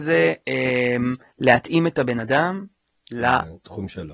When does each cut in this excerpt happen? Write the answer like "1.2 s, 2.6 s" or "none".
1.3 s

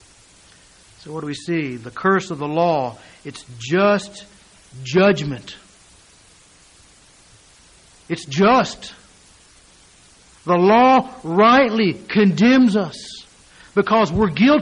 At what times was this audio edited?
none

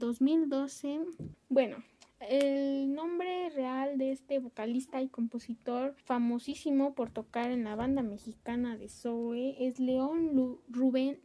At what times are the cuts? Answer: 1.3 s, 6.0 s

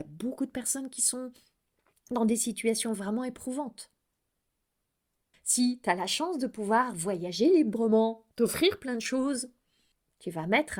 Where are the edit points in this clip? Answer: 5.3 s, 8.3 s

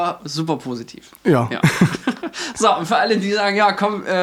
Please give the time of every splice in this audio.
none

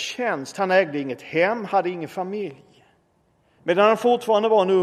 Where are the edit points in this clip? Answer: 3.6 s

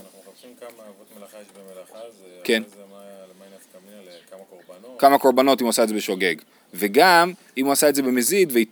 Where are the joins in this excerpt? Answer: none

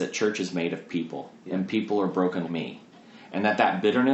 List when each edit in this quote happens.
1.4 s, 2.5 s

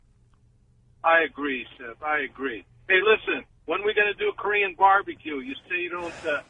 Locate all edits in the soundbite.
none

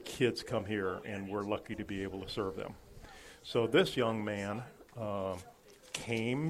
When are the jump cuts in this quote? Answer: none

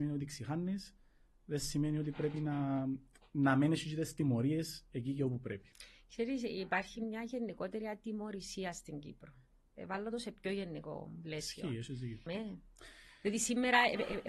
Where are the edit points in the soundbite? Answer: 12.3 s

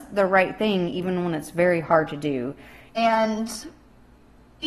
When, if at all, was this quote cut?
2.9 s

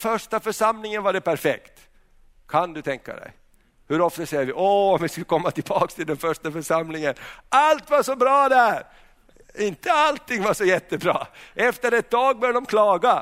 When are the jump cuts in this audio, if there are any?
none

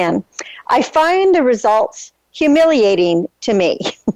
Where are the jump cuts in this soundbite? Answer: none

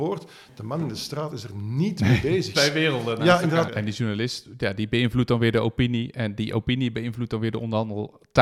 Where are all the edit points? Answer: 2.5 s, 3.7 s

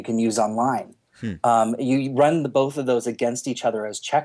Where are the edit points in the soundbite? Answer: none

